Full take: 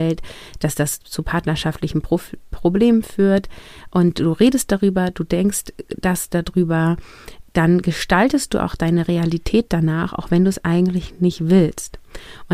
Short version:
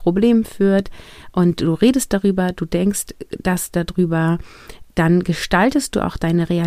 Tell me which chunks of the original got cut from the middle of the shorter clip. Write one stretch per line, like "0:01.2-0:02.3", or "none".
none